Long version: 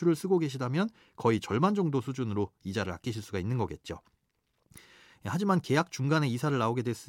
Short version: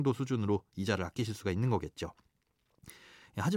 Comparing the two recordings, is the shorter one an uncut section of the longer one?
yes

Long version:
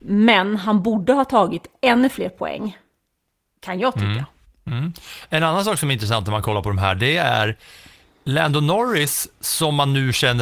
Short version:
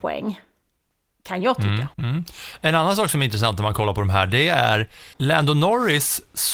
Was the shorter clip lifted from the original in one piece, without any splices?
no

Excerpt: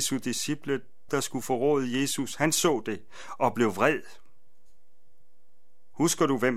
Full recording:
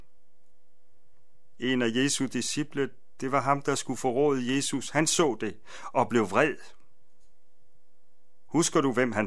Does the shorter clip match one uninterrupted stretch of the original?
no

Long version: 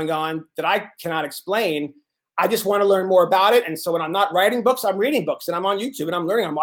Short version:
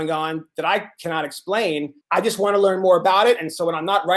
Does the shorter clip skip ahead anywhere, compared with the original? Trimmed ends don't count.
yes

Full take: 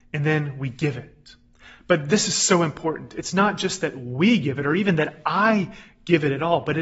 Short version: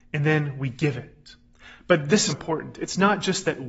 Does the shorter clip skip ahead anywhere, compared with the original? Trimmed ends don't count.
yes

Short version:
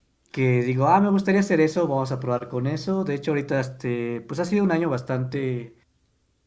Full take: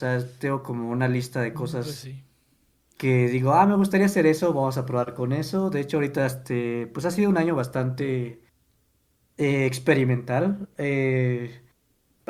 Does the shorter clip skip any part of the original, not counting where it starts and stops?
no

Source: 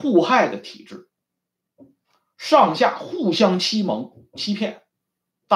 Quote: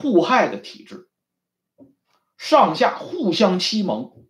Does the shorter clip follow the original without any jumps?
yes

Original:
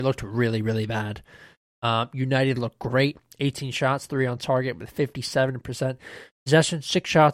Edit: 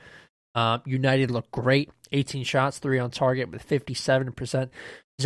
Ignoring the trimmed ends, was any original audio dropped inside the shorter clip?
no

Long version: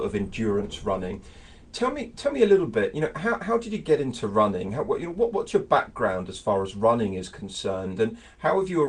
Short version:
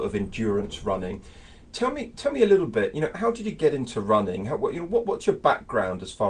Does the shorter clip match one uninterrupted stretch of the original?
no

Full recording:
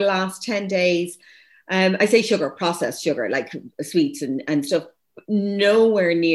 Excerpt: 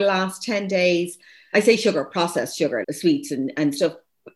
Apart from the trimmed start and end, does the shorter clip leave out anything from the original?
yes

